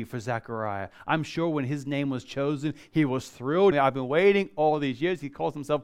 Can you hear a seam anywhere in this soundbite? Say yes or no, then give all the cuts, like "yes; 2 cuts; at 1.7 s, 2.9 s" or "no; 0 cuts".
yes; 1 cut; at 3.7 s